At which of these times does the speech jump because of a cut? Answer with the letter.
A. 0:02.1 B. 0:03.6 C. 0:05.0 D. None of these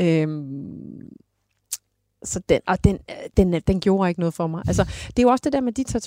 B